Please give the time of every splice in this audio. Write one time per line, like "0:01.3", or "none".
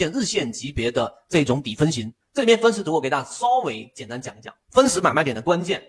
0:02.2
0:04.6

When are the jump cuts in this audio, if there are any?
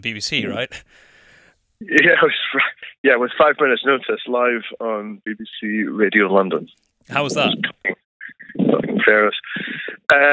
none

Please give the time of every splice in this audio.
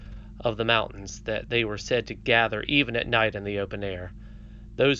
none

